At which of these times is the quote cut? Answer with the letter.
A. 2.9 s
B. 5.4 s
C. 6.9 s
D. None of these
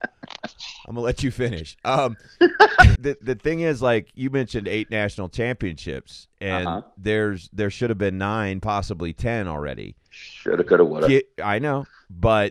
A